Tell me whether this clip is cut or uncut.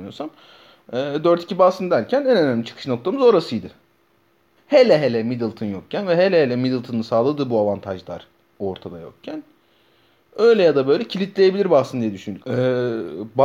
cut